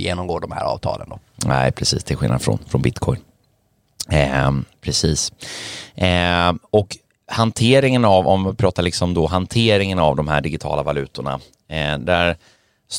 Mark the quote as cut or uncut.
cut